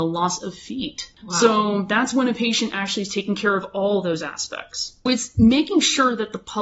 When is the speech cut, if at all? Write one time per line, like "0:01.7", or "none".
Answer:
0:05.1